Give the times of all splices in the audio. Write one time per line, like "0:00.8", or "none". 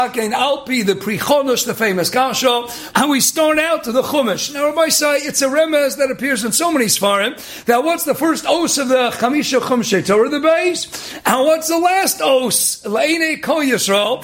0:02.9